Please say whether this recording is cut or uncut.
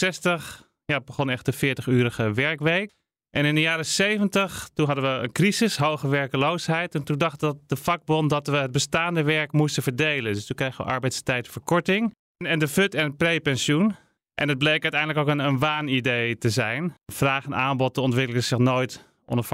uncut